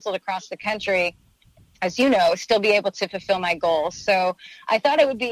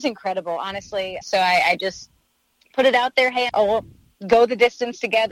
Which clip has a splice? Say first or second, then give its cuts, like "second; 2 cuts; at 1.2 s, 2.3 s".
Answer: second; 2 cuts; at 1.2 s, 3.5 s